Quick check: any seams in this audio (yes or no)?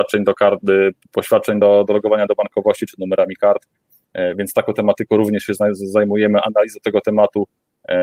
no